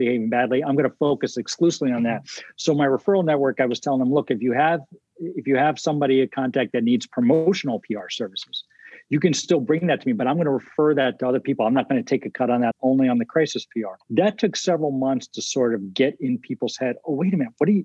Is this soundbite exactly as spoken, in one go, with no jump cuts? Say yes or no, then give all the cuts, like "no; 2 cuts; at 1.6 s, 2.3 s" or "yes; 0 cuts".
no; 2 cuts; at 12.7 s, 14.0 s